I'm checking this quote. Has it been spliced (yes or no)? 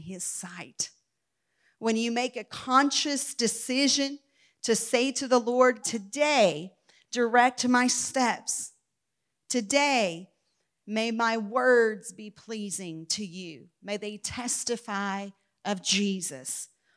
yes